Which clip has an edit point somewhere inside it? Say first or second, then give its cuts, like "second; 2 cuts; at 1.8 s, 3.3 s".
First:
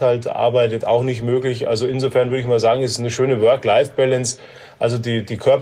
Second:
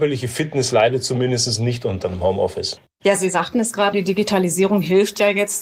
second; 1 cut; at 3.9 s